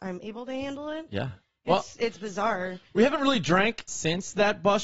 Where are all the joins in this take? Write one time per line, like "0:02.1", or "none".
0:03.9